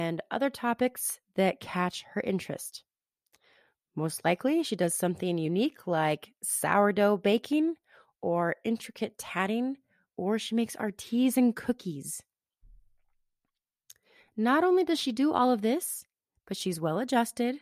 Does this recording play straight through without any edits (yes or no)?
yes